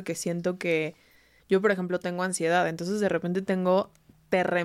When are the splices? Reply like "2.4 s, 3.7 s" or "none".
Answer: 1.4 s